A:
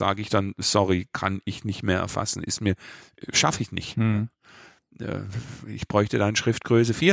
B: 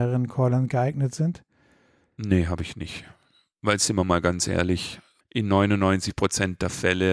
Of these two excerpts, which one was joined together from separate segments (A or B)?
B